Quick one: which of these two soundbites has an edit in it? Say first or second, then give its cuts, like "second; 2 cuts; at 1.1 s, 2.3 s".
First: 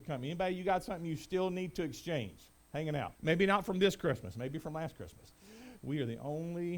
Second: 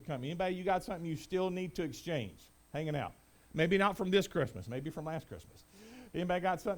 first; 2 cuts; at 3.2 s, 5.8 s